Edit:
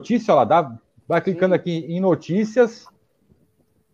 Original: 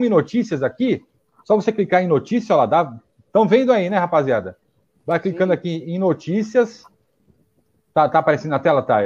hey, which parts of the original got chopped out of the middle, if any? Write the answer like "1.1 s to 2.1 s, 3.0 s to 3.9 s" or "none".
3.2 s to 5.0 s